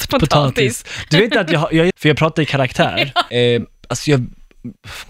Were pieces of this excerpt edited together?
yes; 2 cuts; at 1.9 s, 3.3 s

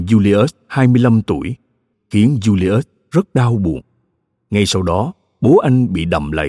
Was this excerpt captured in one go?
no; 1 cut; at 1.9 s

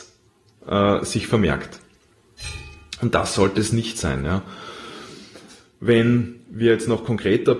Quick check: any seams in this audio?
no; 0 cuts

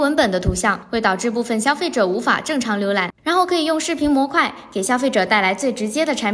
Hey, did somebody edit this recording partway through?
yes; 1 cut; at 3.2 s

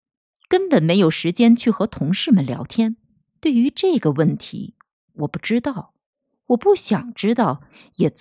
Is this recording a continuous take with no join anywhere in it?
no; 1 cut; at 3.3 s

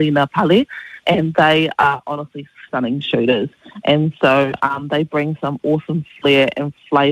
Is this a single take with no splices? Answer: no; 1 cut; at 2.7 s

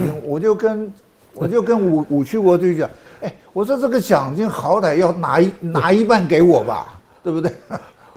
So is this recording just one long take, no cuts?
yes; 0 cuts

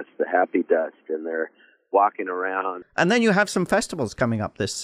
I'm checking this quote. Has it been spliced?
yes; 1 cut; at 2.8 s

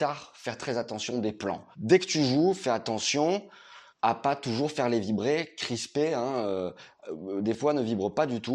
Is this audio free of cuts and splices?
no; 2 cuts; at 1.7 s, 3.9 s

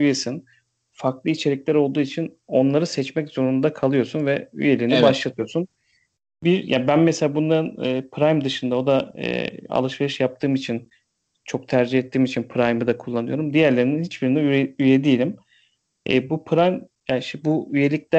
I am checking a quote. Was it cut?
no; 0 cuts

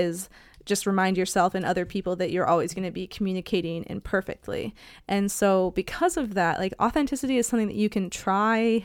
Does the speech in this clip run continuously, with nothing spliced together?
yes; 0 cuts

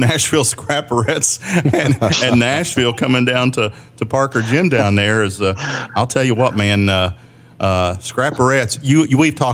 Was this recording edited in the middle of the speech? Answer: no; 0 cuts

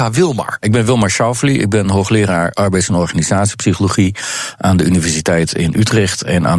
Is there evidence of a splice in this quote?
no; 0 cuts

